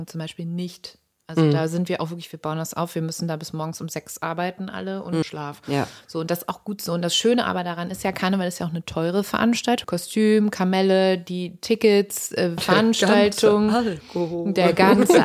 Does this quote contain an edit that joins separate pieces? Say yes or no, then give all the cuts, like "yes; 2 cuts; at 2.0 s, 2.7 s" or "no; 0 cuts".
yes; 3 cuts; at 5.2 s, 9.8 s, 12.6 s